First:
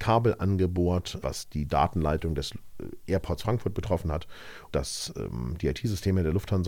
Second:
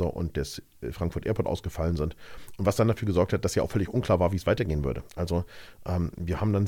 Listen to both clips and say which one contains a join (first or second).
first